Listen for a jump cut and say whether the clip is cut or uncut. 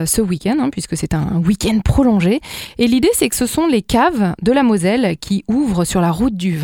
uncut